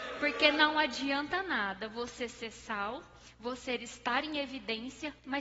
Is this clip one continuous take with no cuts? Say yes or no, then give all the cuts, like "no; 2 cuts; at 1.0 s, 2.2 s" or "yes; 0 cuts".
yes; 0 cuts